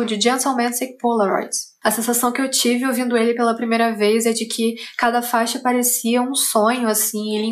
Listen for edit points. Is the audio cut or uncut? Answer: cut